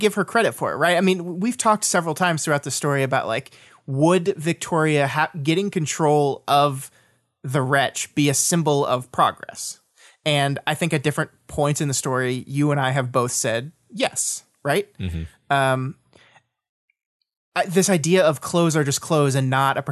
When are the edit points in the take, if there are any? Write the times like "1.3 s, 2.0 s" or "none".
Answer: none